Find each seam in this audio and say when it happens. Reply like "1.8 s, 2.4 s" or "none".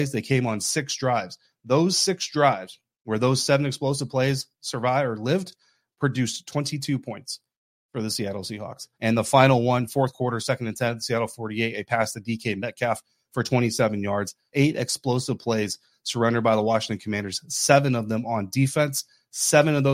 8.9 s, 14.5 s